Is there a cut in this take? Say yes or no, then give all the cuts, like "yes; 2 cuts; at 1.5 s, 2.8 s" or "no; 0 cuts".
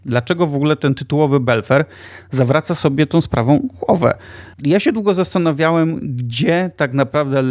yes; 1 cut; at 4.5 s